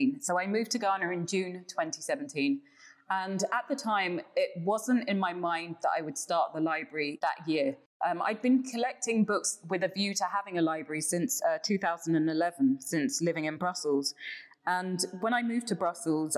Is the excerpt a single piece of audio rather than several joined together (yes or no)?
yes